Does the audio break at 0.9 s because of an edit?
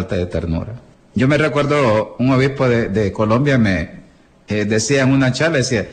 yes; 1 cut; at 0.9 s

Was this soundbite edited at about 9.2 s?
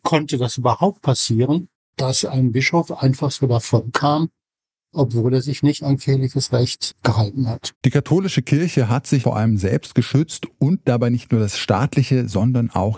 yes; 2 cuts; at 7.7 s, 9.2 s

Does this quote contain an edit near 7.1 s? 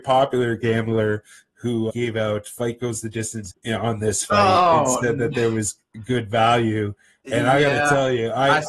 no; 2 cuts; at 1.9 s, 3.5 s

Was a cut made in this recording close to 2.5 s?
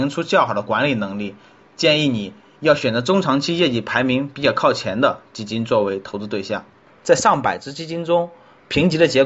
no; 1 cut; at 6.9 s

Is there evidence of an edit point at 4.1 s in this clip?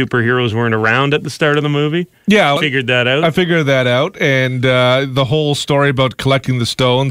no; 1 cut; at 2.6 s

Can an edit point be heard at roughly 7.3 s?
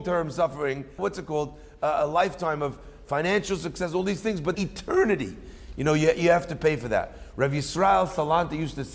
no; 2 cuts; at 1.0 s, 4.5 s

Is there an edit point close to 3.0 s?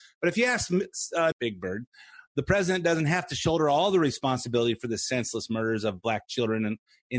no; 1 cut; at 1.3 s

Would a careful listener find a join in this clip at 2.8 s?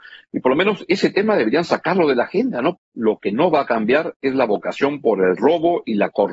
yes; 1 cut; at 2.8 s

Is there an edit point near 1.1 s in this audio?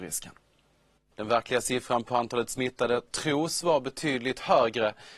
yes; 1 cut; at 1.1 s

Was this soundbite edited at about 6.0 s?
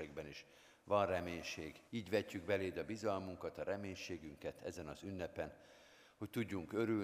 no; 1 cut; at 1.9 s

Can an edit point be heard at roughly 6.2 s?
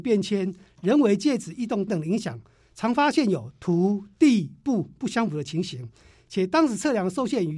no; 1 cut; at 1.9 s

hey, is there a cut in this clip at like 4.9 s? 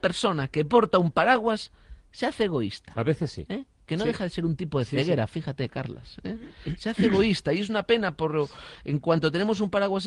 no; 0 cuts

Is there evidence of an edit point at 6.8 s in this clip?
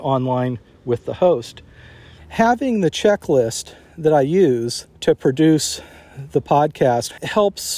no; 2 cuts; at 2.2 s, 5.0 s

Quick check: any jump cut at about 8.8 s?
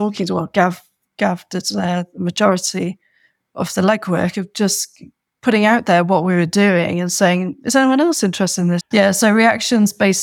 yes; 1 cut; at 8.8 s

